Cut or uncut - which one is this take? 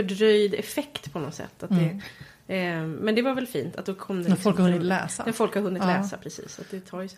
uncut